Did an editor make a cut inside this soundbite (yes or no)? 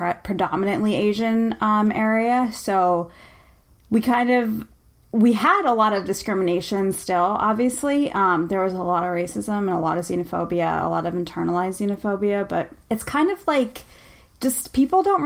yes